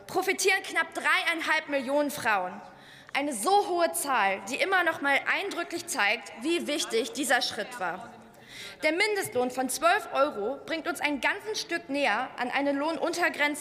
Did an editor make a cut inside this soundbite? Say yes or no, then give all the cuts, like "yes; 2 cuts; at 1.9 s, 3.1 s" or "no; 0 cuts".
no; 0 cuts